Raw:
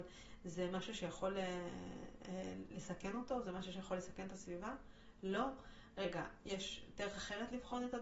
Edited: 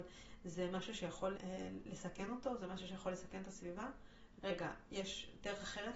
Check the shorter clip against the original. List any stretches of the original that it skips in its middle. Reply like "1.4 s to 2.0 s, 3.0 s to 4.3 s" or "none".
1.3 s to 2.2 s, 5.2 s to 5.9 s

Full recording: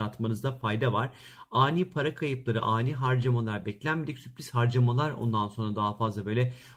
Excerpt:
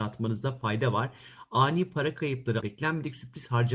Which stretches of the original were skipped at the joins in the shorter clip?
2.6 s to 3.6 s

